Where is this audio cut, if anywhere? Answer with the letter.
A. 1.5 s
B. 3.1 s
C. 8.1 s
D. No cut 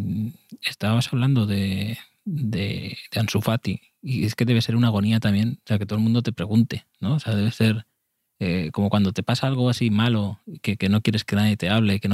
D